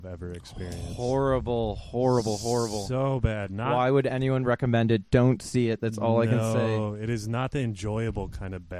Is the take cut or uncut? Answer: uncut